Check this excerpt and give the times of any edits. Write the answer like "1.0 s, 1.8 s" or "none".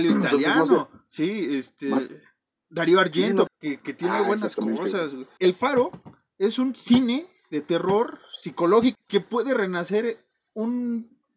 3.5 s, 5.4 s, 8.9 s